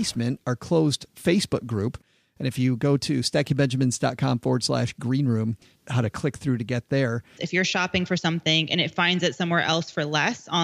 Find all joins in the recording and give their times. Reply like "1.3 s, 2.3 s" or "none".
5.7 s, 7.4 s

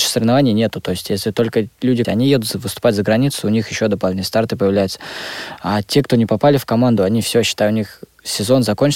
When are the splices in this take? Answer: 2.0 s

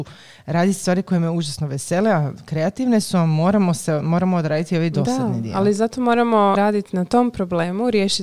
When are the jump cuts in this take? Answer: 6.6 s

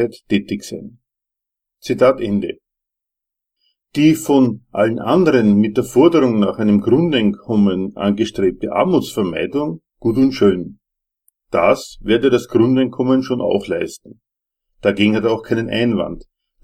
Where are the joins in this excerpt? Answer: none

